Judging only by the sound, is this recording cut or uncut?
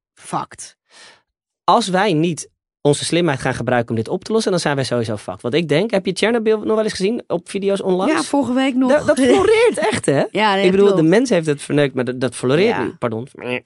uncut